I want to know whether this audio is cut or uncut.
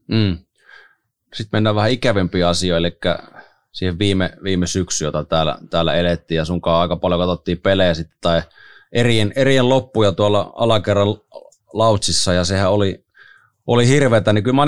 uncut